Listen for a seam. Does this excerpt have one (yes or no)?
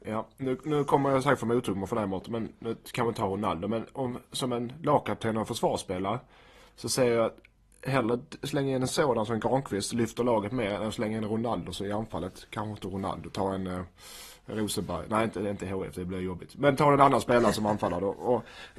no